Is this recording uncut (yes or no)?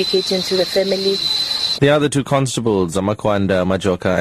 no